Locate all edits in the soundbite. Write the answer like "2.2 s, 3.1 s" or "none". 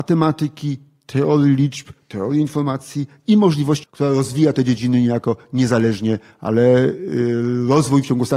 3.8 s

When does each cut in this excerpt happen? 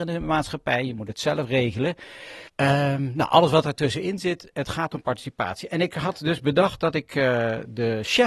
2.5 s

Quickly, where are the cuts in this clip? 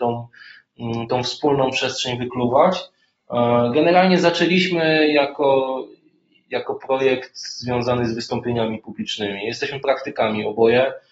none

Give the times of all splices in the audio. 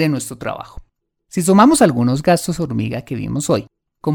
1.2 s

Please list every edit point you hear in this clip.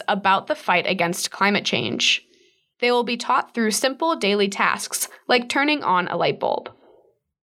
2.7 s

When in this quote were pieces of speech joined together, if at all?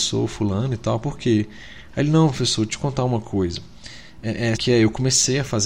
4.6 s

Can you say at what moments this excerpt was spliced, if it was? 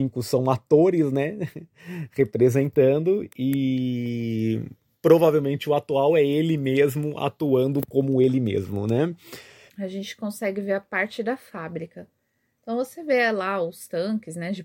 9.7 s

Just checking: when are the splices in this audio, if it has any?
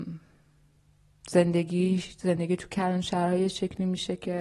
none

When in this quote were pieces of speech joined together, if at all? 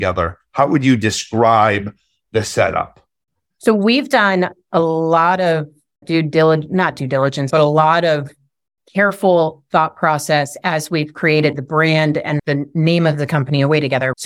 7.5 s, 12.4 s

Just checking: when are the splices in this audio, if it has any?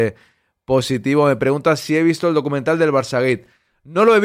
none

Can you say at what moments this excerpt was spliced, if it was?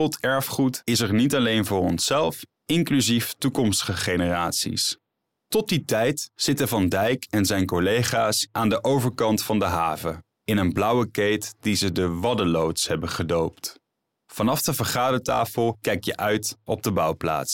2.5 s, 5.4 s

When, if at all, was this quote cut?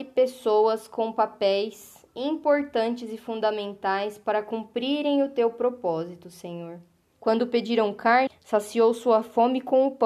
7.1 s, 8.3 s

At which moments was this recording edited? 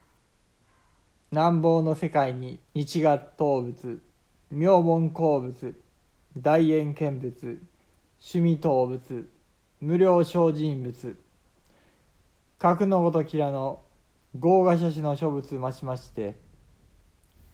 2.6 s

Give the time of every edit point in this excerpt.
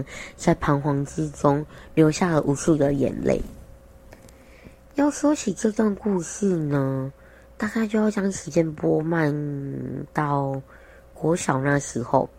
none

